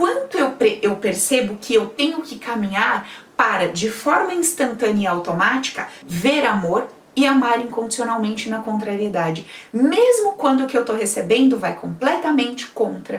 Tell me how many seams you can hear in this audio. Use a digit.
1